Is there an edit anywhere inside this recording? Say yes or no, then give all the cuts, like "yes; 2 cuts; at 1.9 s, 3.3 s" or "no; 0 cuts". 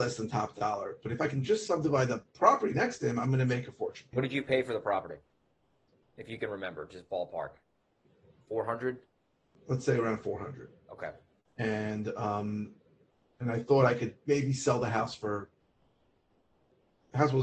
yes; 1 cut; at 4.1 s